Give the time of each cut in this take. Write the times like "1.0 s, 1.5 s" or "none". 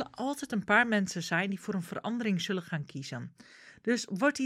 none